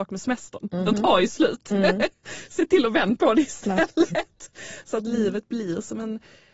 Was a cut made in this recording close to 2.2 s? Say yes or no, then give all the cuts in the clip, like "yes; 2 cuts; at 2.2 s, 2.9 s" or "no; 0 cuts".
no; 0 cuts